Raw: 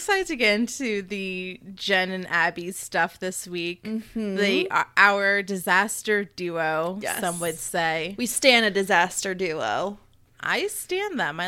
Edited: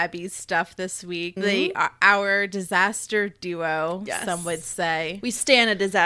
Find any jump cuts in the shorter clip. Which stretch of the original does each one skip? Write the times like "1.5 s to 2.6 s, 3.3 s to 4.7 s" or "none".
3.8 s to 4.3 s